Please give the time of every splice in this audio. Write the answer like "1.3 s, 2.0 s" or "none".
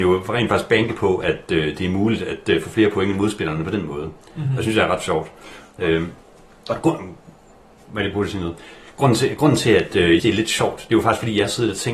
10.2 s